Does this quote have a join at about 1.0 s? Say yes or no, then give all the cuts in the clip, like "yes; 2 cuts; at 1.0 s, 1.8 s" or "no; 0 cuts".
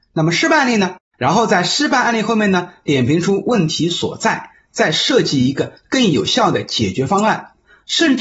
yes; 1 cut; at 1.0 s